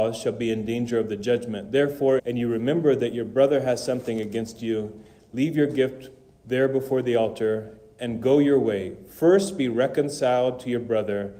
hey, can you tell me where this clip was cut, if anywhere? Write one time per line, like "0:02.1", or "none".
0:02.2